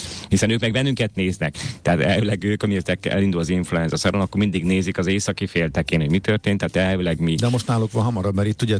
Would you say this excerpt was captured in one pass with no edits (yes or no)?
yes